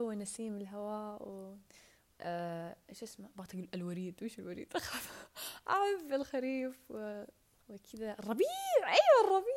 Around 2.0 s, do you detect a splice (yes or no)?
yes